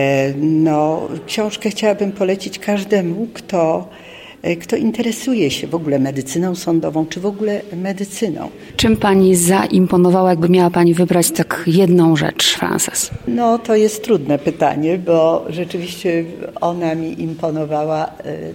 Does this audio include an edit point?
no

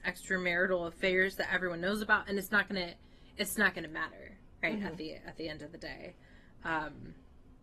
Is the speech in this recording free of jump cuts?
yes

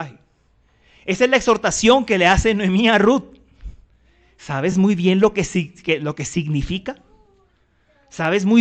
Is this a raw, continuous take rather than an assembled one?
yes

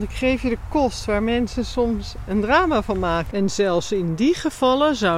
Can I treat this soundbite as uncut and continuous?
no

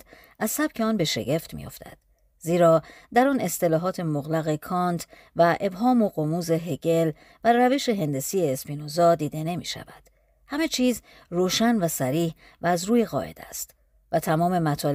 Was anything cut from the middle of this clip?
no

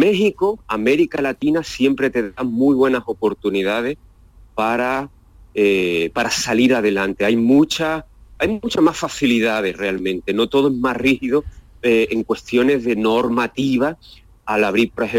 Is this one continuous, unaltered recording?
yes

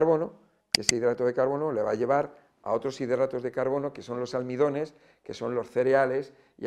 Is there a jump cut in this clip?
no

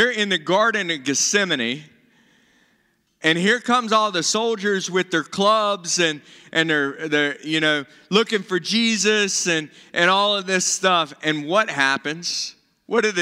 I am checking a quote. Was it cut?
no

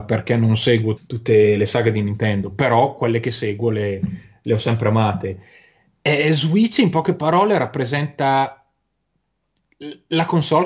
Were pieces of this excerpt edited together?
yes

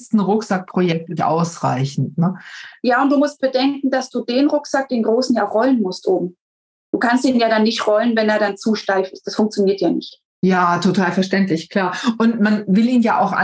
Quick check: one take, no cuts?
no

